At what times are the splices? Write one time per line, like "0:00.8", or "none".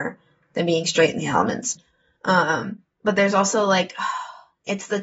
0:01.8
0:02.9